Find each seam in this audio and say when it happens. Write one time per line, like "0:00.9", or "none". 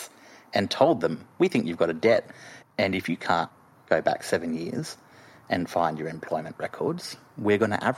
0:02.6